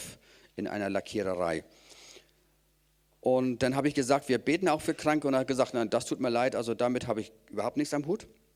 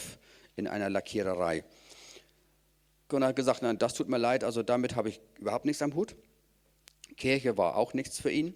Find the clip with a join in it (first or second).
second